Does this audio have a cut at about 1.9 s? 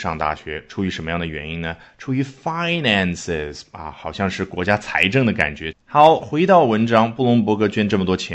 no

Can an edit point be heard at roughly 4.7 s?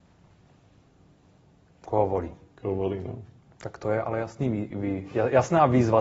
yes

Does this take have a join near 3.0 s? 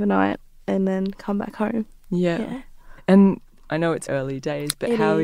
yes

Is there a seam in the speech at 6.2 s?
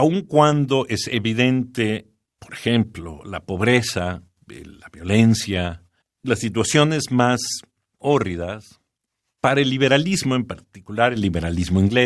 yes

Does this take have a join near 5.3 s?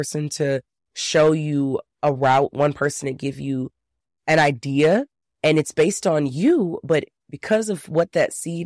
no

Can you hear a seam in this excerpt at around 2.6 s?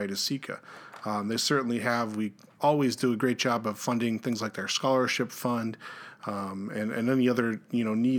yes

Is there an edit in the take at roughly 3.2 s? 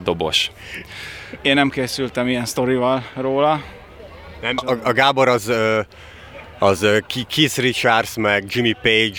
no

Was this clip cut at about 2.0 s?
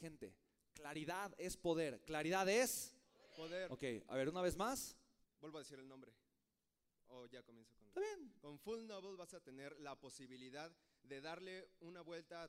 no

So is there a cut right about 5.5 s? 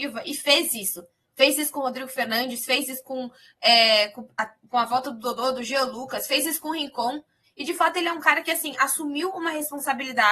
no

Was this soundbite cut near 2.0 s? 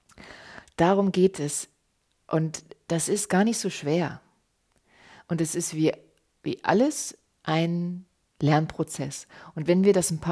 no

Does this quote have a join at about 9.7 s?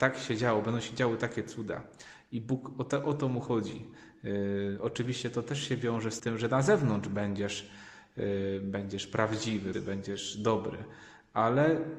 yes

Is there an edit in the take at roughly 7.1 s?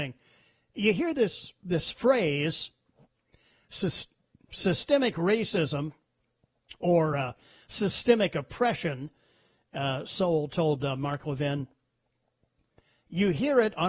no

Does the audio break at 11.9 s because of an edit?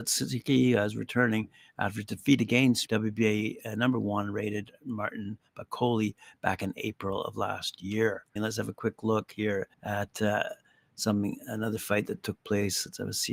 no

